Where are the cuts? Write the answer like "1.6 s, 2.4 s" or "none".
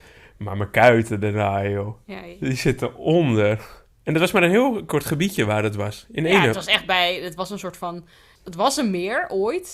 3.9 s

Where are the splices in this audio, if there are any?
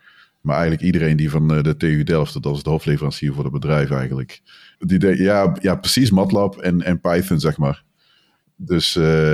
4.8 s

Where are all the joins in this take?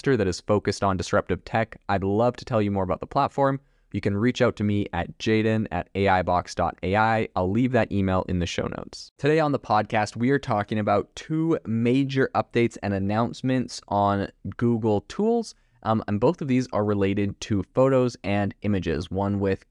none

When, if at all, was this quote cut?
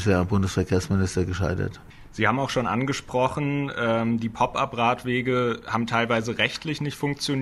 none

